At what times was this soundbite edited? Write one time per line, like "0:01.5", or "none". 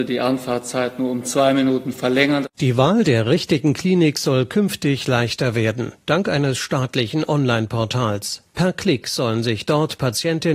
none